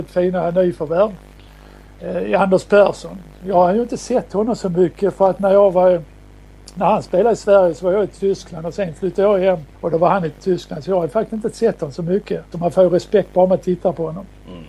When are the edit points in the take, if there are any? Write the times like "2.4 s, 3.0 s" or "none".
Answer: 9.7 s, 12.5 s